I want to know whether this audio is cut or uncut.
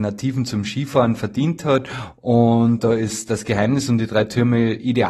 uncut